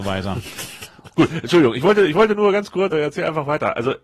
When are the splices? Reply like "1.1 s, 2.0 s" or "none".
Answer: 1.1 s, 2.9 s